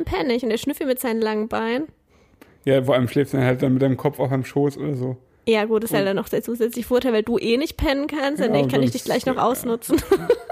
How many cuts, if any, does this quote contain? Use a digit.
0